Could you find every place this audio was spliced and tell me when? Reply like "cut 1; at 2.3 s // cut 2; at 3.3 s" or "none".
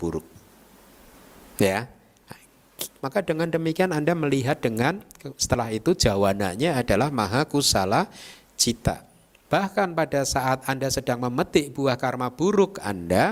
cut 1; at 3.0 s // cut 2; at 9.4 s